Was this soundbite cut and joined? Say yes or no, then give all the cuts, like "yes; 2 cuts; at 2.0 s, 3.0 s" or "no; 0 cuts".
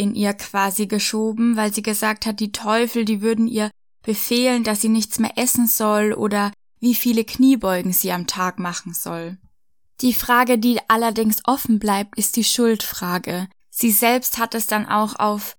yes; 1 cut; at 13.6 s